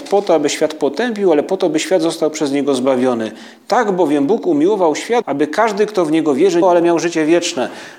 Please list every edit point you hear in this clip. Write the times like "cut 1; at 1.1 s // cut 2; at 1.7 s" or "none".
cut 1; at 5.2 s // cut 2; at 6.6 s